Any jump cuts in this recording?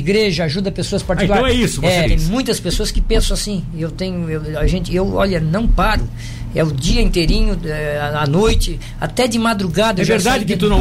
yes; 1 cut; at 2.0 s

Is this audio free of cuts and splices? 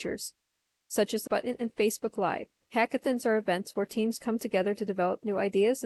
no; 2 cuts; at 1.3 s, 2.7 s

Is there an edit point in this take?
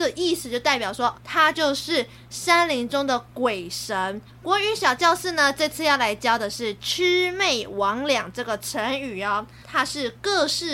yes; 3 cuts; at 1.1 s, 4.3 s, 9.6 s

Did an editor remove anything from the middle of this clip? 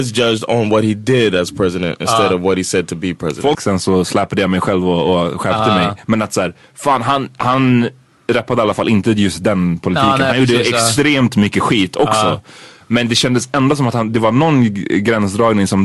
yes; 1 cut; at 3.5 s

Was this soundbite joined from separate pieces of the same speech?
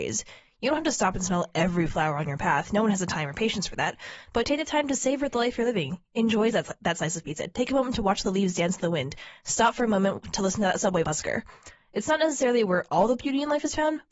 no; 0 cuts

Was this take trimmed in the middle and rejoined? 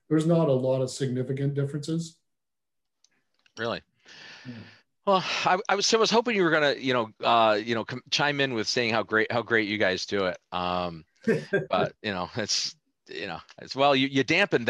no; 0 cuts

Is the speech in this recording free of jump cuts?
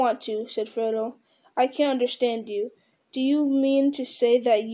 yes; 0 cuts

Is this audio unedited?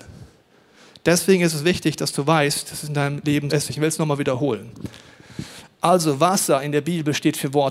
no; 1 cut; at 3.5 s

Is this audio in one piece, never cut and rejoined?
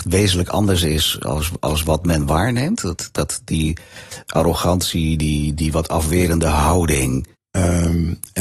no; 2 cuts; at 5.6 s, 7.3 s

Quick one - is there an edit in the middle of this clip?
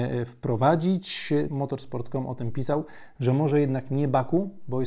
yes; 1 cut; at 1.5 s

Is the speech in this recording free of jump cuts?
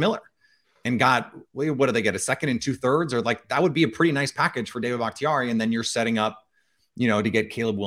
yes; 0 cuts

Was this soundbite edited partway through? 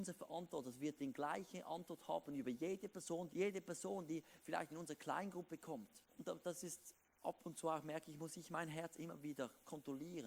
yes; 2 cuts; at 3.3 s, 6.1 s

